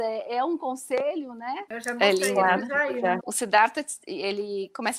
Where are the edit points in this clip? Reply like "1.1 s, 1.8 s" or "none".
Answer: 1.7 s, 3.2 s